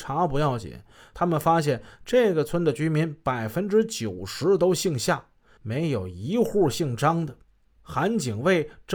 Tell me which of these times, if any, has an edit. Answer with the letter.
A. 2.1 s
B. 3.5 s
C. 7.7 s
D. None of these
C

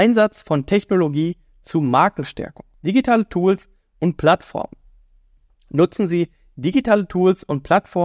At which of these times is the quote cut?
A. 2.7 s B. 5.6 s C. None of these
A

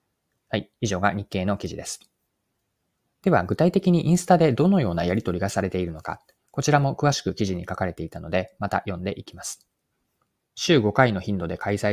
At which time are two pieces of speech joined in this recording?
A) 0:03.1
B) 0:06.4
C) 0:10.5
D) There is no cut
C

